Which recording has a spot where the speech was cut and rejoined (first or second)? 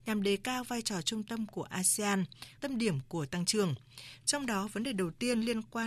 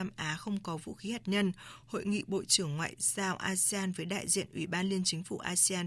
first